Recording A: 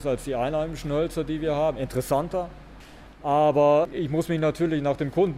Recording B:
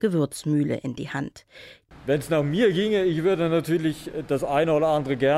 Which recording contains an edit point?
B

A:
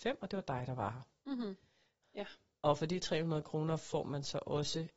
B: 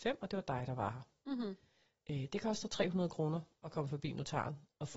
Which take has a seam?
A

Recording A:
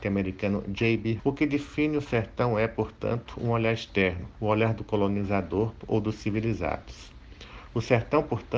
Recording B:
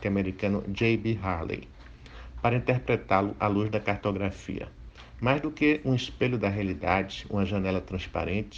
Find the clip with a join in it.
A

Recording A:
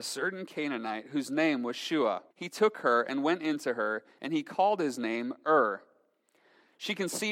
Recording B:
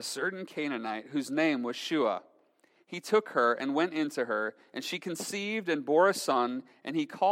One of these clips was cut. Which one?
A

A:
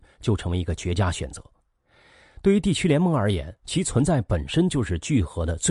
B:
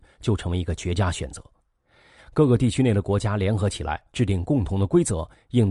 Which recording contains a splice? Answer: B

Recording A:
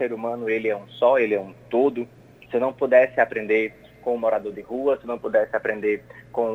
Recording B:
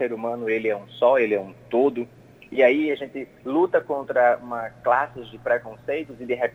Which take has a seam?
A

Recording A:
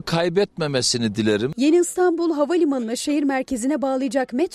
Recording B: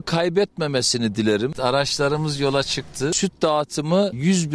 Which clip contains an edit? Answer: B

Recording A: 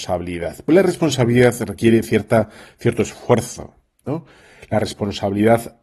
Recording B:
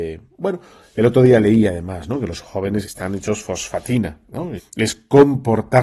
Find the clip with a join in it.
B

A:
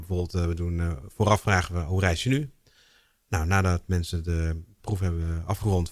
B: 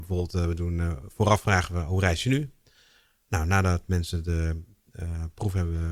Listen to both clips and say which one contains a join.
A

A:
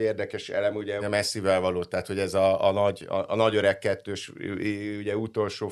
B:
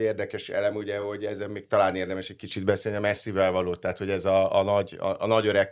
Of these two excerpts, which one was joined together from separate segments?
A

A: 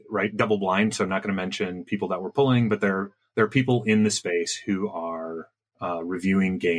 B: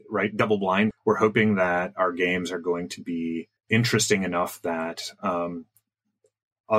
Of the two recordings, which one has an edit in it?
B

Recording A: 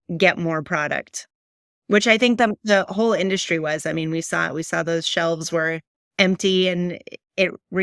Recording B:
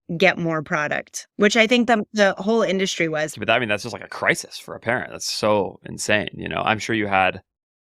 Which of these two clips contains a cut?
B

